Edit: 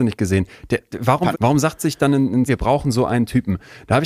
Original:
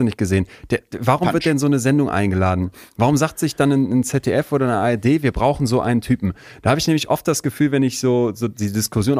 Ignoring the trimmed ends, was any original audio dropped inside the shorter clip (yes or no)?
yes